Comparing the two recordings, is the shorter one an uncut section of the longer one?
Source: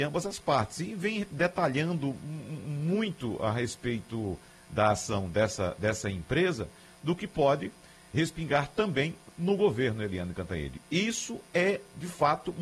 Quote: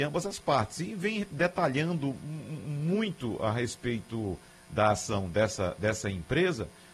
yes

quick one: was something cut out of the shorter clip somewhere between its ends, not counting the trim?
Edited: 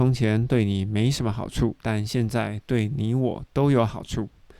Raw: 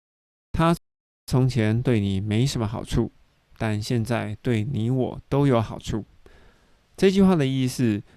yes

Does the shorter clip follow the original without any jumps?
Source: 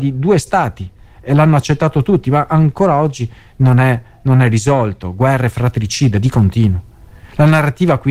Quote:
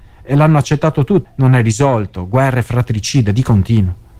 no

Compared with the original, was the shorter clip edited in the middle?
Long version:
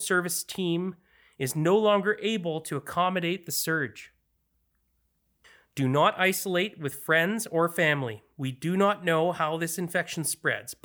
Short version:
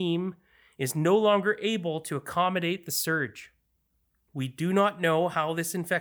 yes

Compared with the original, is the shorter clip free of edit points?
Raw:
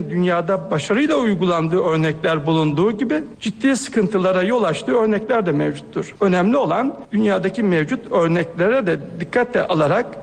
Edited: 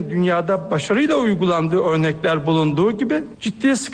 yes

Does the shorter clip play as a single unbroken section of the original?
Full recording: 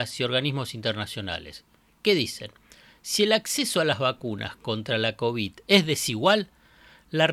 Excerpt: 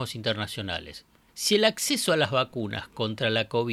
no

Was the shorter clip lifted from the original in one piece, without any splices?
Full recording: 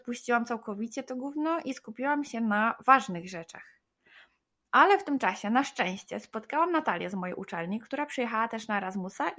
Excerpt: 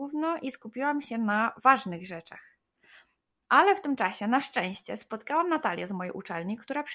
yes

